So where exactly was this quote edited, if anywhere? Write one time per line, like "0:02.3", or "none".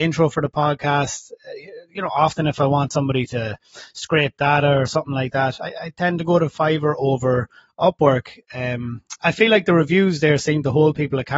0:09.2